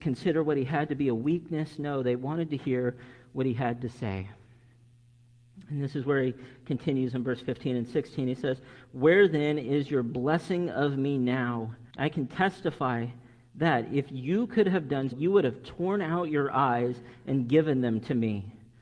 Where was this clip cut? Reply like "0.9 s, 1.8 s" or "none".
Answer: 11.9 s, 15.1 s